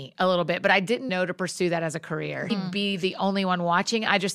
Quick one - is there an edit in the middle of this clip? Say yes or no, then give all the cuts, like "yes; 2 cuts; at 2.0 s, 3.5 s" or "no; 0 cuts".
yes; 2 cuts; at 1.1 s, 2.5 s